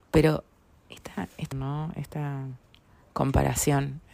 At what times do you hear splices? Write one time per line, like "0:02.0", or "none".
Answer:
0:01.5